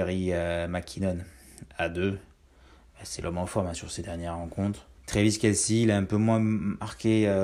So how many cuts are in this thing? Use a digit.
2